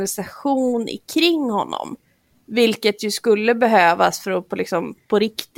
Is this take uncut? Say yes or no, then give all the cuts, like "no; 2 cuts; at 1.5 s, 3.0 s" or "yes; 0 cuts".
yes; 0 cuts